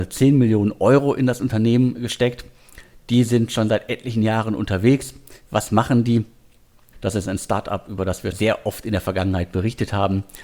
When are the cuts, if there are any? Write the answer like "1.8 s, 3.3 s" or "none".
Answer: 6.9 s, 8.3 s